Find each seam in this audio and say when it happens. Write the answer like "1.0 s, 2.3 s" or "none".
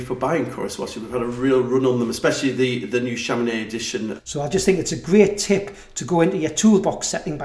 4.2 s